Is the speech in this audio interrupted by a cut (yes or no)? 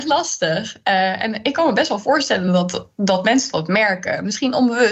no